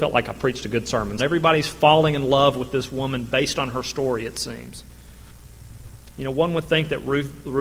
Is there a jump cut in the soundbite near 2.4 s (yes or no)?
no